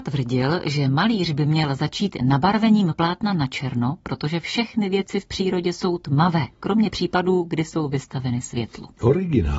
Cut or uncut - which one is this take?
uncut